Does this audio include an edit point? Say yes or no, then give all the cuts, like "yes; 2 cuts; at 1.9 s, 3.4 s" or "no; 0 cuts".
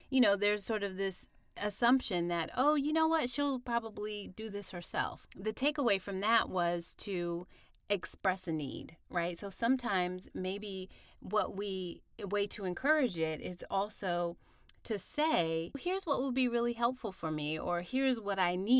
no; 0 cuts